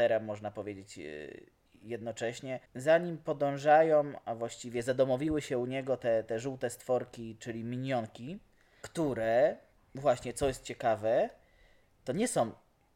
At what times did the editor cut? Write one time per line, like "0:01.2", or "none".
none